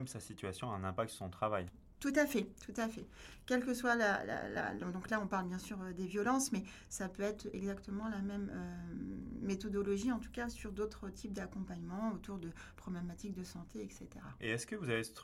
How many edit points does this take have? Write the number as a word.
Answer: zero